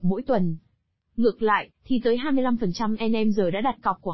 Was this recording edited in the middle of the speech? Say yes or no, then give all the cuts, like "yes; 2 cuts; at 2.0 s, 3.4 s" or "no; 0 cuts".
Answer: yes; 1 cut; at 1.7 s